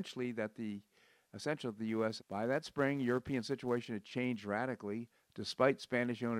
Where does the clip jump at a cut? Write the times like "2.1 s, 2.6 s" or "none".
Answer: 2.2 s, 5.2 s